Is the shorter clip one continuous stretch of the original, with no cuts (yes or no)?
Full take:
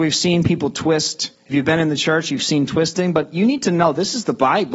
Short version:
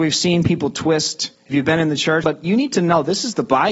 no